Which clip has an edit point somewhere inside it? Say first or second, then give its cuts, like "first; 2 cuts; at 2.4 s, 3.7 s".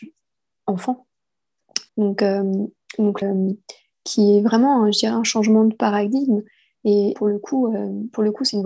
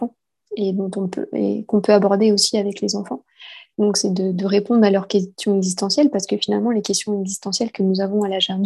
first; 3 cuts; at 1.9 s, 3.2 s, 7.1 s